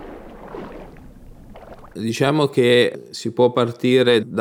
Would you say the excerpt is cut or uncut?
cut